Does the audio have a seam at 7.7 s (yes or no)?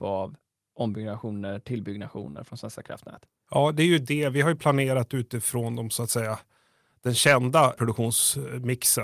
yes